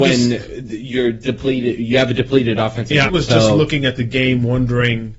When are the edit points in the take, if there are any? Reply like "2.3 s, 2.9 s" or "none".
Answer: 3.1 s